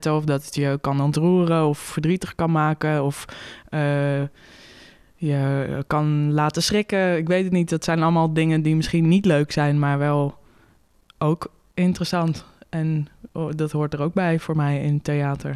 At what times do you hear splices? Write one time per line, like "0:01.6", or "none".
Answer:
none